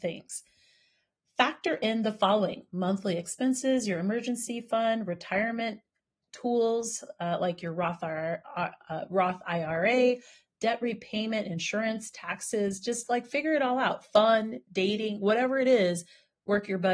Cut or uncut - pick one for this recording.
uncut